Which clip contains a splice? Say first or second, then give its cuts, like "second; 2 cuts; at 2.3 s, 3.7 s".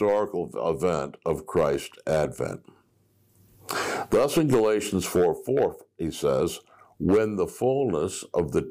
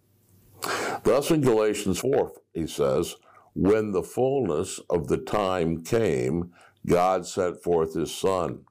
second; 1 cut; at 2.0 s